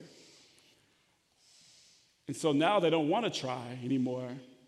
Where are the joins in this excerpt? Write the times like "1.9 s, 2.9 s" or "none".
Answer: none